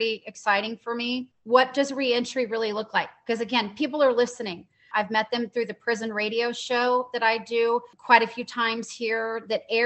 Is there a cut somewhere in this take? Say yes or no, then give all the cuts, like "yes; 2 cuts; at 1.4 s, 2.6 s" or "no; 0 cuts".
yes; 2 cuts; at 1.3 s, 4.9 s